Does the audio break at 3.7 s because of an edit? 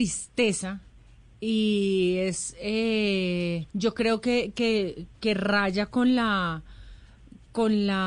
yes; 1 cut; at 3.7 s

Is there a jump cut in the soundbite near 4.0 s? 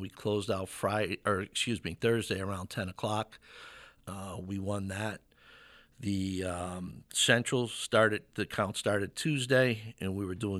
yes; 1 cut; at 4.0 s

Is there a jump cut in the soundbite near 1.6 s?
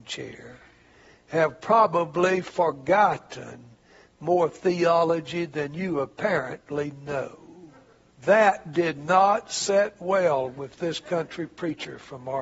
no; 1 cut; at 8.1 s

